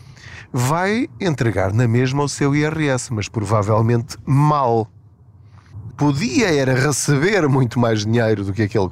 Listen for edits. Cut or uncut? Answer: cut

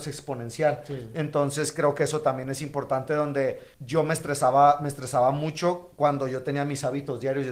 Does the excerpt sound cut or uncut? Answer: cut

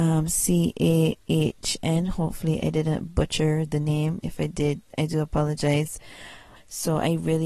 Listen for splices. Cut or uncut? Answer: cut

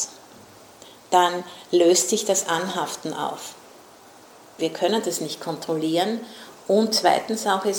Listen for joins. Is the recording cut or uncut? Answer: cut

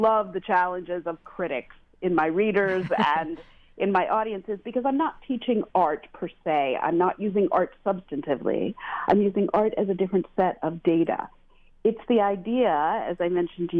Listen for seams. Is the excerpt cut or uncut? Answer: uncut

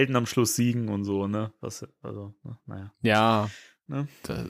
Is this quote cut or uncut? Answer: uncut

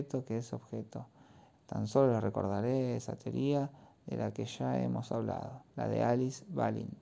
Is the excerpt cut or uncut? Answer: cut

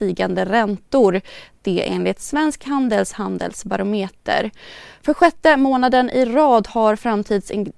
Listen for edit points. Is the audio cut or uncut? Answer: uncut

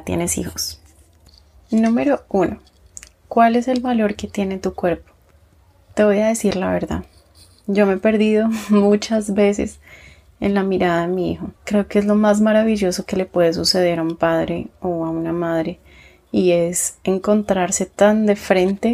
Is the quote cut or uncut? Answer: cut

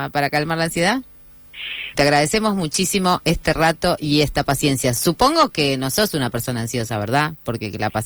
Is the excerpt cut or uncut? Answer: cut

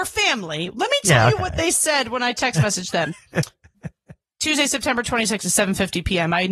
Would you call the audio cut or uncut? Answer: uncut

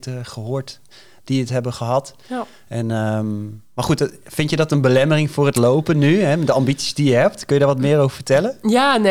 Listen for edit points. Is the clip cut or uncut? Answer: uncut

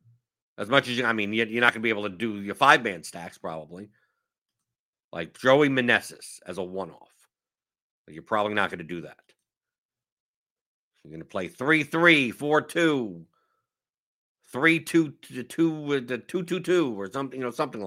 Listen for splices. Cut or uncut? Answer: cut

